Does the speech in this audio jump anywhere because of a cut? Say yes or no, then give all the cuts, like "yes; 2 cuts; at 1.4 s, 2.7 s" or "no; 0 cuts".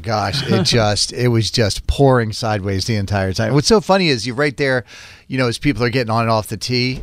no; 0 cuts